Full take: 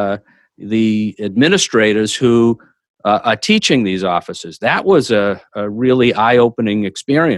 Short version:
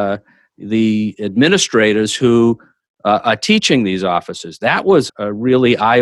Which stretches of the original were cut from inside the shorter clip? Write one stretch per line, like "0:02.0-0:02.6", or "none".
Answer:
0:05.1-0:05.4